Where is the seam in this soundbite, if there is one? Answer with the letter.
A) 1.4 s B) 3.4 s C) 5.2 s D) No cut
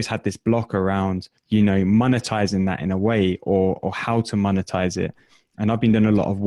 A